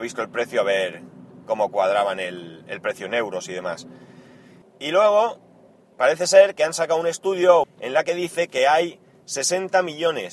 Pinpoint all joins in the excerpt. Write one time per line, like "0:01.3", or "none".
0:04.6
0:07.6

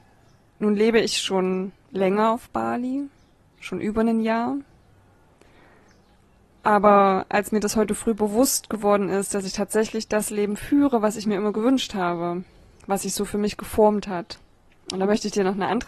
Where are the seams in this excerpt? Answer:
none

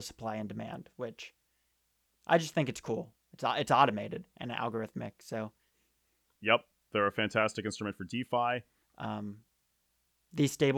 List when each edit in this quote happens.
0:06.4
0:08.8

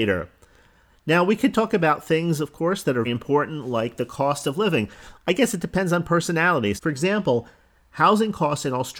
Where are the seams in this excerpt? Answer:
0:03.0
0:05.2
0:06.8

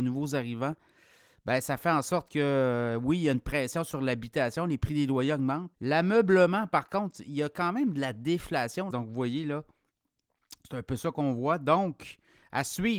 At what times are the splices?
0:05.7
0:08.9

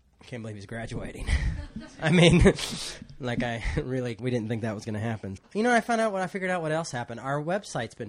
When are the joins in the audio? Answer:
0:04.2
0:05.4

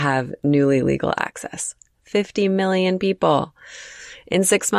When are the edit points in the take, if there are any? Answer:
none

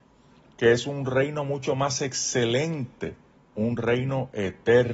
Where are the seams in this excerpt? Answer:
0:03.4

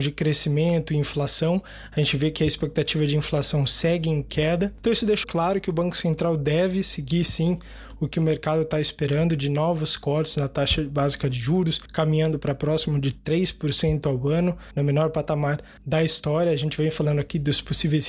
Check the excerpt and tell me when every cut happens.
0:05.2

